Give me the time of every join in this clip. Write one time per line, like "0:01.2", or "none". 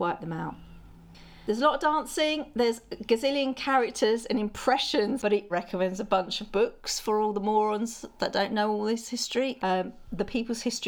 0:05.5